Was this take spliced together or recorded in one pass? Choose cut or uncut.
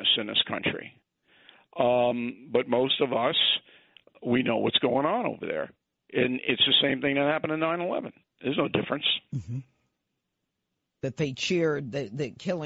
uncut